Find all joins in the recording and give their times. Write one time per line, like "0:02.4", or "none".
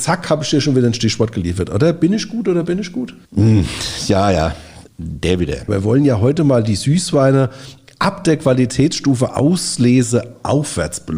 0:03.2
0:05.7

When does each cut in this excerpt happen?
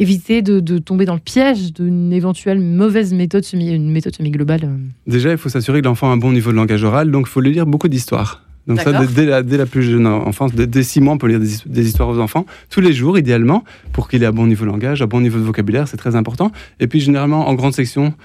none

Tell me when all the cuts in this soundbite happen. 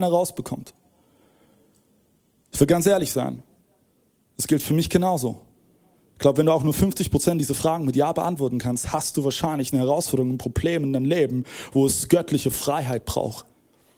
none

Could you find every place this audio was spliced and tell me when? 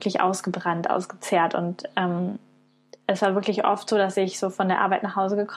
none

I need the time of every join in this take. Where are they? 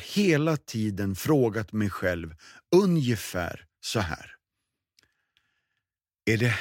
none

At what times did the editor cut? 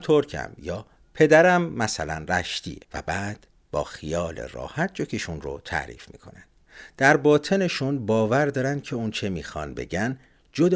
0:02.8

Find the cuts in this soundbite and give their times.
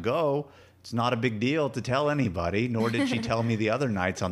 none

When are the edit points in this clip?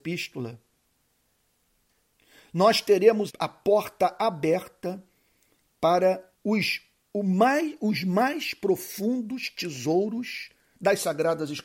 0:03.3
0:06.3

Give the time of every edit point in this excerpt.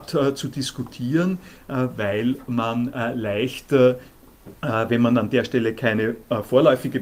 0:04.6

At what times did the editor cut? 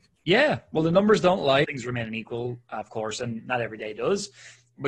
0:01.6

